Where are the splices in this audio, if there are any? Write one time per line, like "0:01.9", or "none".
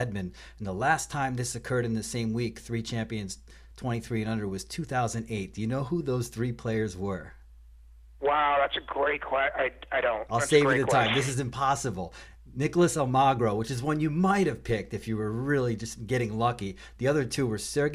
none

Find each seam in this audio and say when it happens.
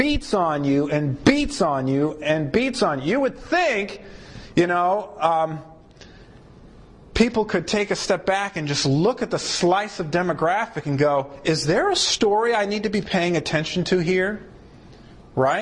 none

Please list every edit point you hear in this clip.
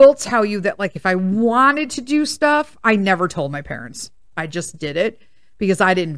none

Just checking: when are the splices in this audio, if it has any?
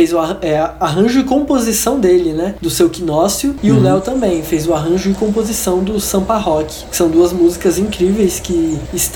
none

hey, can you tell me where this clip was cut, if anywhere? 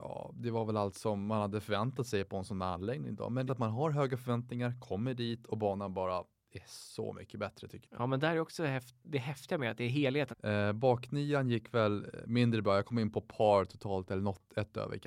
0:03.5
0:10.3

